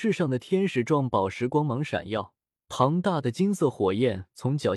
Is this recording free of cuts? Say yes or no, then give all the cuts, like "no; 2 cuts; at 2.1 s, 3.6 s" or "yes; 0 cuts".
no; 1 cut; at 2.6 s